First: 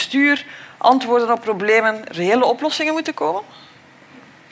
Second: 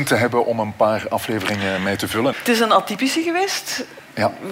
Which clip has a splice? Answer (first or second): second